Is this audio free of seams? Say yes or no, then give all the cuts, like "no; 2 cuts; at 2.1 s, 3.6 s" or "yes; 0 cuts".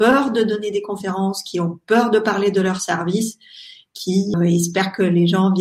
no; 1 cut; at 4.3 s